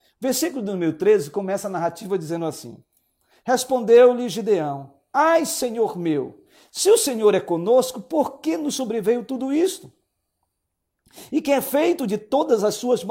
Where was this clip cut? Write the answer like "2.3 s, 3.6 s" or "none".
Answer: none

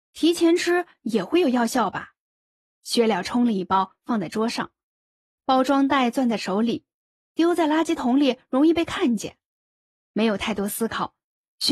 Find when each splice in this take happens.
none

